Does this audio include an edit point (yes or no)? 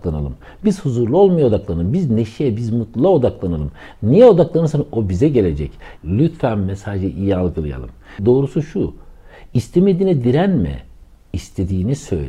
yes